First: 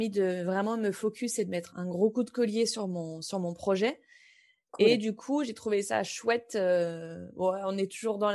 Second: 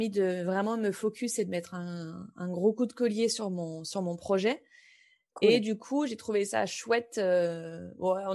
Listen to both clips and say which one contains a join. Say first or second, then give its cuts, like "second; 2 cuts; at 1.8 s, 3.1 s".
first; 1 cut; at 1.7 s